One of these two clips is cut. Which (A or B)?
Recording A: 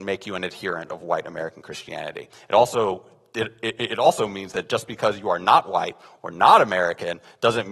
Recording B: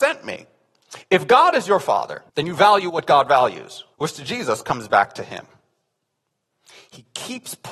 B